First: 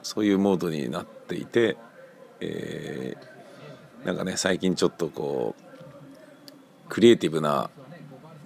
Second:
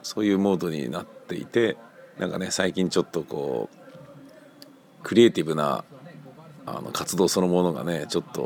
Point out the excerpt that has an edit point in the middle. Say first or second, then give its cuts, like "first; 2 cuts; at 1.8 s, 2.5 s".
second; 1 cut; at 2.1 s